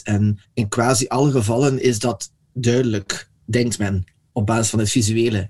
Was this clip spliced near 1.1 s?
no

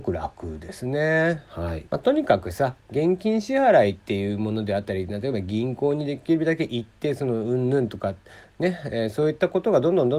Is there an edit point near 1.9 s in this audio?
yes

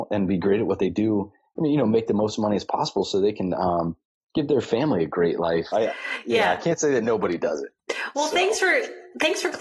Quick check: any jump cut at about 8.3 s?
no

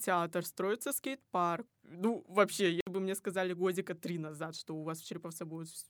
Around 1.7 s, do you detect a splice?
yes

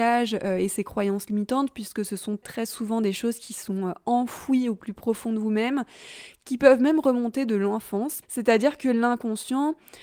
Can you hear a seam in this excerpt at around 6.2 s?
no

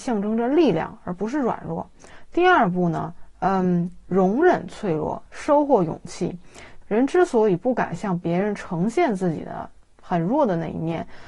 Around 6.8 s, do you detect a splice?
yes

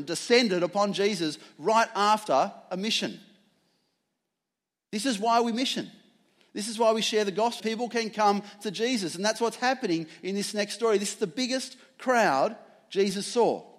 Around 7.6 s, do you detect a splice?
yes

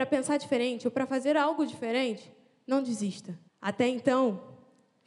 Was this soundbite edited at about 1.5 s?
no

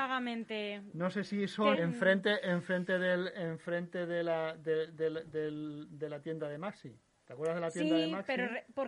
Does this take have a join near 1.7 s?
yes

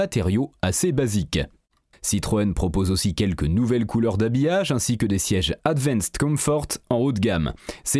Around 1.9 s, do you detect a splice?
yes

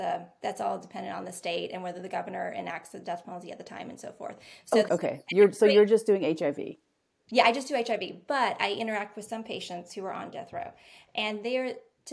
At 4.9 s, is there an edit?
yes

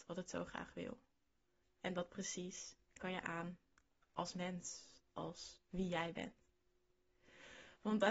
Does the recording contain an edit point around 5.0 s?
yes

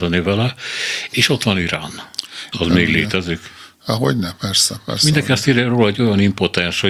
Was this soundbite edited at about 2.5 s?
yes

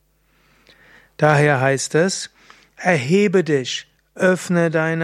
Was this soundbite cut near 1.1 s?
no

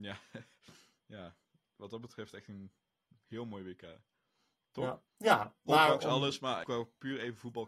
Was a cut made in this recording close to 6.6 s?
yes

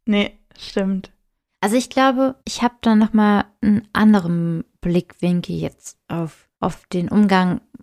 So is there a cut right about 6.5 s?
yes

